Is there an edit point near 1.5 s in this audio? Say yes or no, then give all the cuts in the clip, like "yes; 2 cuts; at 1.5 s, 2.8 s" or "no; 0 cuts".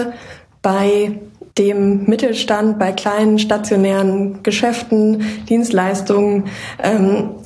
yes; 1 cut; at 1.5 s